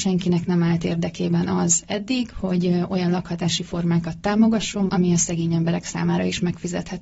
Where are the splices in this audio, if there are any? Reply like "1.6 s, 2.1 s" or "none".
4.9 s